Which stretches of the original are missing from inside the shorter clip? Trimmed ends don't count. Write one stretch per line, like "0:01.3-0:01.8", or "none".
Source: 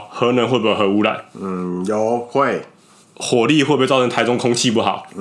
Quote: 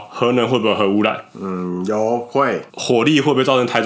0:02.7-0:03.1